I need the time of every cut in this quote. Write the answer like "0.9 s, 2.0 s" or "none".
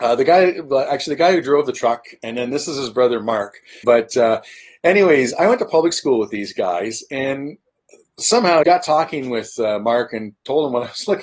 3.8 s, 8.6 s